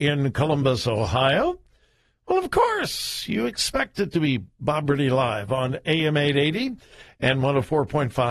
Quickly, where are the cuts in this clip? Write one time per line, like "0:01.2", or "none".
none

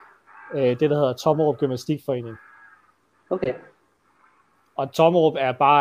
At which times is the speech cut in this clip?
none

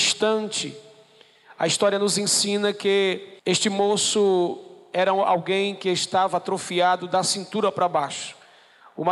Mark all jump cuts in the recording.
0:03.4

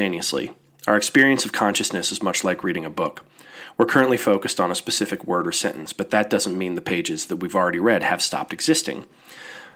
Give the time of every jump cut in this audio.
none

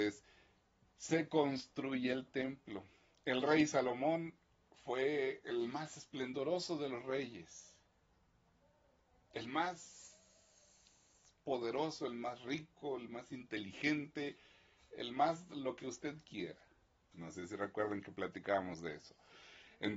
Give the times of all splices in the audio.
0:17.1

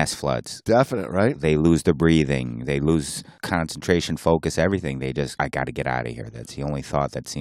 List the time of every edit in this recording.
none

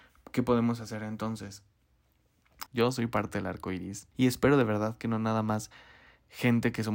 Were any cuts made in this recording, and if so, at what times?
0:02.7
0:04.1

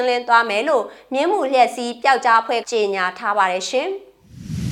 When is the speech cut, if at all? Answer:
0:02.6

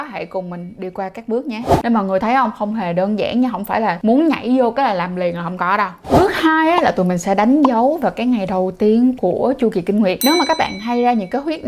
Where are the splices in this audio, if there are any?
0:01.8

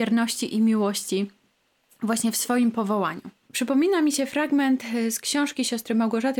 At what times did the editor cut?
0:03.5

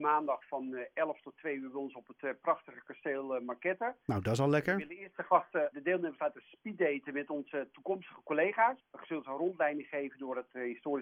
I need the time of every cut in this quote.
0:05.7
0:08.8

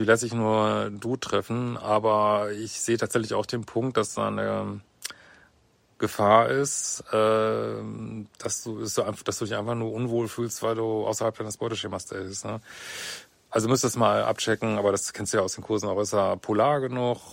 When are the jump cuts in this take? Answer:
none

